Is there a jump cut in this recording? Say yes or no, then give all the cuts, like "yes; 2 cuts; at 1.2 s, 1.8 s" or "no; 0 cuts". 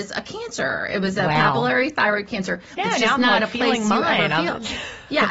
yes; 1 cut; at 2.8 s